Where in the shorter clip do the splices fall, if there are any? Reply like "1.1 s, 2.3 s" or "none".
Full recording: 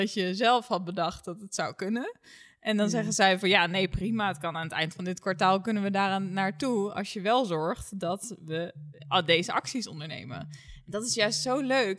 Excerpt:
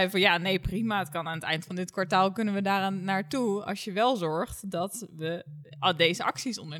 none